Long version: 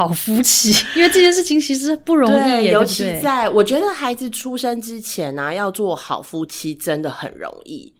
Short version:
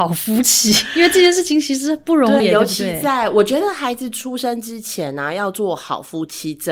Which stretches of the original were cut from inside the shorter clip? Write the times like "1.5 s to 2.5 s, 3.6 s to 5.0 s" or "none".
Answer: 2.4 s to 2.6 s